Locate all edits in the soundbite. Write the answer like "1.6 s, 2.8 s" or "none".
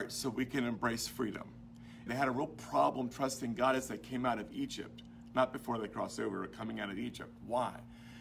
2.1 s

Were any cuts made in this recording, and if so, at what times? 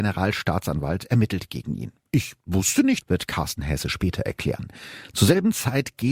3.0 s

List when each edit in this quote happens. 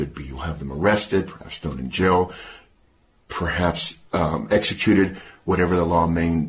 4.1 s

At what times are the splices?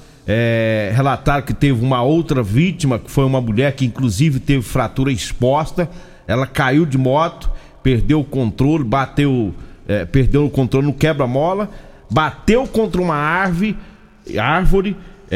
none

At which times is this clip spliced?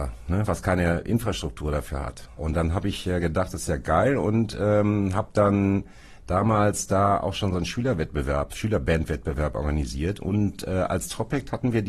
2.4 s

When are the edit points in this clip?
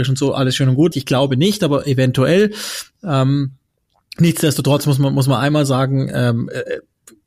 0.9 s

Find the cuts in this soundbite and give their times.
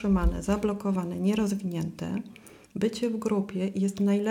2.7 s

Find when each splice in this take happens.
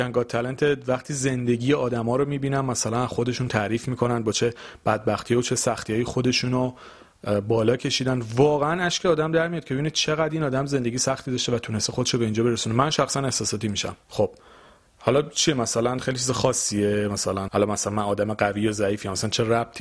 14.0 s, 17.5 s

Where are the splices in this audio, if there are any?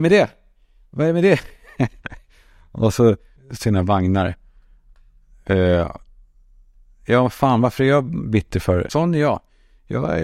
3.4 s, 8.9 s

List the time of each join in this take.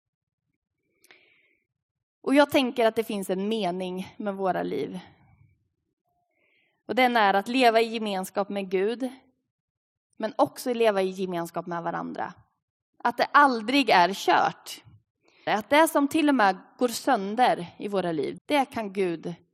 13.0 s, 15.5 s, 18.4 s

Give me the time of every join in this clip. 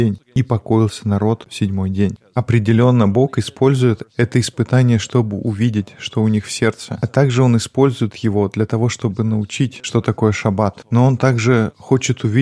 none

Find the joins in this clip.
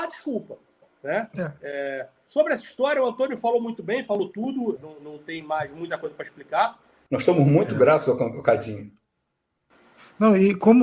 4.8 s, 7.1 s

